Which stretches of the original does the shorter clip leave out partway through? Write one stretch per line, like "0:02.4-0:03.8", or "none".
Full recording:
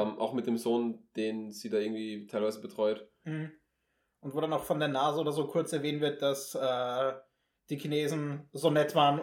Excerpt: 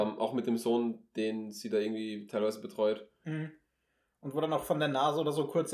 none